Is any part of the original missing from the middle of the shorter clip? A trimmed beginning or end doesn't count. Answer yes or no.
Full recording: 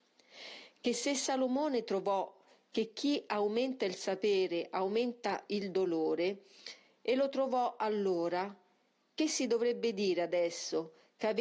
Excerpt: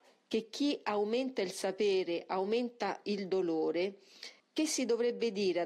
yes